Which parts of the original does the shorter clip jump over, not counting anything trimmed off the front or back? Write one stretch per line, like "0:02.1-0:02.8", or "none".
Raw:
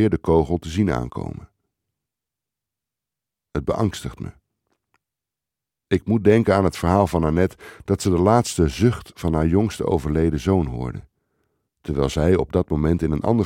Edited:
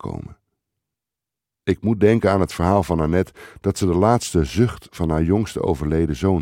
0:02.7-0:05.8